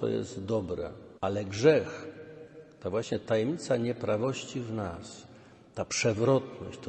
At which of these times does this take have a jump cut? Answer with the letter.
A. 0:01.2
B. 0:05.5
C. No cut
A